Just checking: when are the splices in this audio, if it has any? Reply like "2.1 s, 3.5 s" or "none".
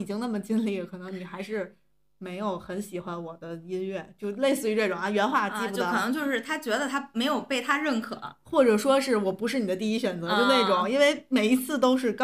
none